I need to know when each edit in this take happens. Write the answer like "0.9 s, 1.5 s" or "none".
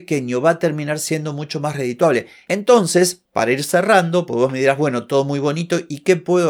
none